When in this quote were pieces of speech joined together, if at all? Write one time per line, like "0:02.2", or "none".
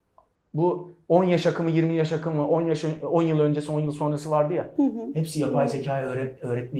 none